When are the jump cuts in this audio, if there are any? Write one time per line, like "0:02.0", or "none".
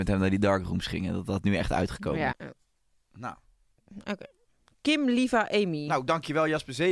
0:02.3